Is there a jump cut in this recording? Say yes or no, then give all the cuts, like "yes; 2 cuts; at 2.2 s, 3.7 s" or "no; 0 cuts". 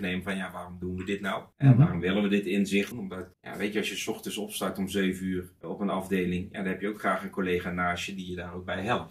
yes; 1 cut; at 2.9 s